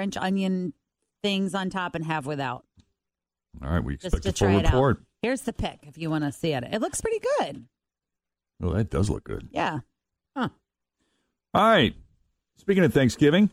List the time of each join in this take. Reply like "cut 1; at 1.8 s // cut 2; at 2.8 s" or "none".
none